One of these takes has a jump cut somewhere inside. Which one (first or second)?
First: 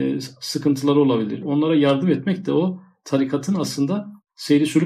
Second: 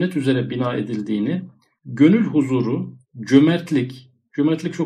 first